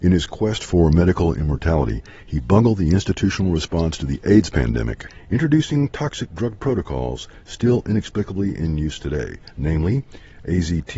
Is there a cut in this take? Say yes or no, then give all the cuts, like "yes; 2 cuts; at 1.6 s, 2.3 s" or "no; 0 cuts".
no; 0 cuts